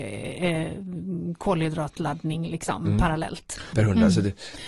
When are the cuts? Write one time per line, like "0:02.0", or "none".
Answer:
0:03.7